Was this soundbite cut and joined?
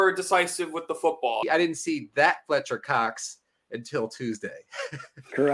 yes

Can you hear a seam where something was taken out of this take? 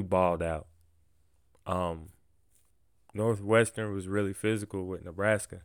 no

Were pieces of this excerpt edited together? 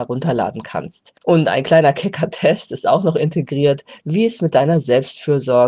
yes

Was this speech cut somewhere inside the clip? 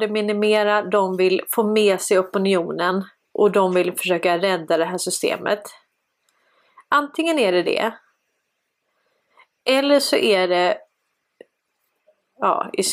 no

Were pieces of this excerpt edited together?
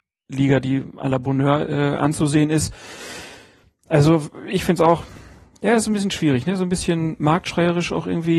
no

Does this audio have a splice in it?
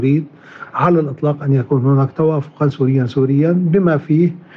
no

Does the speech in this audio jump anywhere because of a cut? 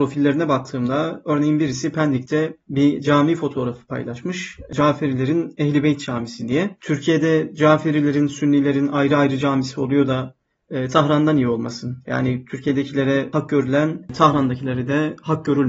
no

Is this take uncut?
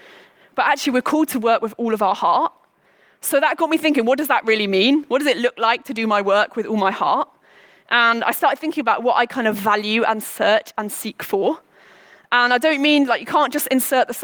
yes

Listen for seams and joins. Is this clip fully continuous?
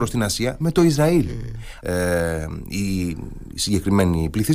no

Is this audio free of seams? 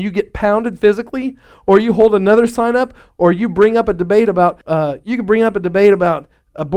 no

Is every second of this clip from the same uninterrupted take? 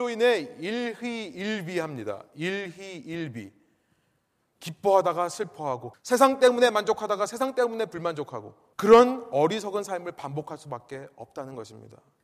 no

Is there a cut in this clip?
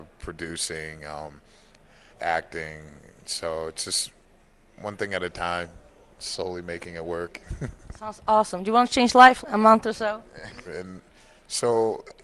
yes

